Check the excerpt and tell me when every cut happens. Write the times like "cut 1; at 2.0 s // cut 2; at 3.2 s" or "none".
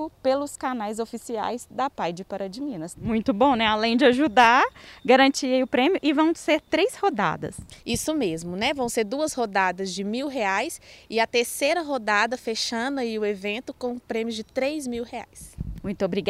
cut 1; at 2.9 s

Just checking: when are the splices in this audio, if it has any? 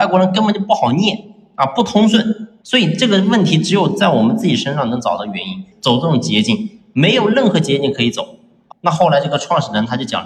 cut 1; at 2.6 s // cut 2; at 5.7 s // cut 3; at 8.7 s

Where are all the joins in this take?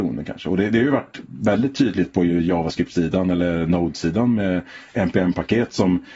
none

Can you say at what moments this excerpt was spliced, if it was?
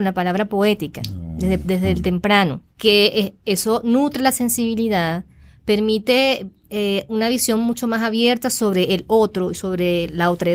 cut 1; at 2.7 s

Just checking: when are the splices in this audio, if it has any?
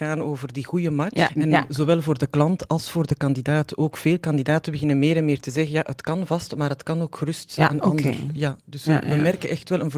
cut 1; at 1.3 s

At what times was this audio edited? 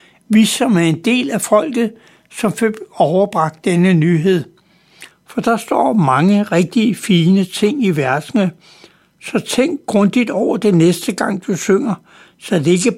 cut 1; at 5.1 s

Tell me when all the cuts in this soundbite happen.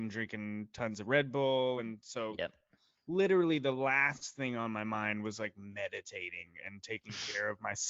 none

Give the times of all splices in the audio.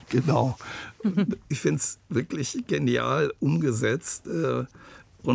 cut 1; at 1.5 s

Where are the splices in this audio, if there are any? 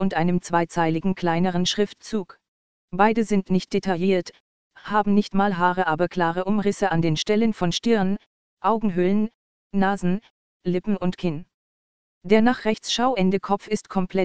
cut 1; at 2.7 s

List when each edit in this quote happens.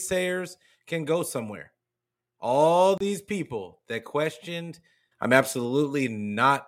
cut 1; at 5.1 s

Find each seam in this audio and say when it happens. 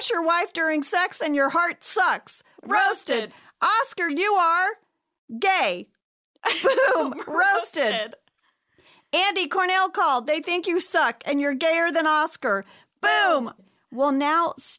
cut 1; at 2.6 s // cut 2; at 13.6 s

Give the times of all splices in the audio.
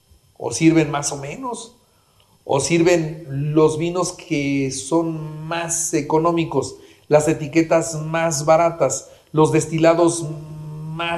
none

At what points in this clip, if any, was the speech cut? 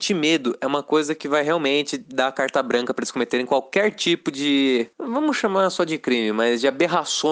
none

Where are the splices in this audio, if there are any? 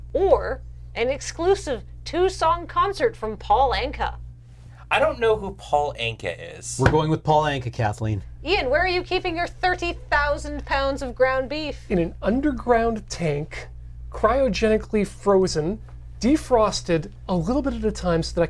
none

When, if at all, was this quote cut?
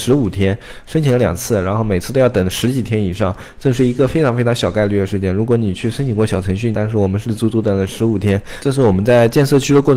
cut 1; at 6.7 s

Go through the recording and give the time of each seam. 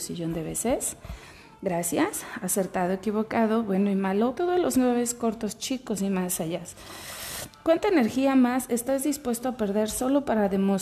cut 1; at 4.3 s

